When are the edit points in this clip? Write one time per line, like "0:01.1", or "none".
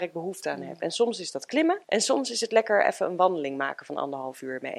0:01.8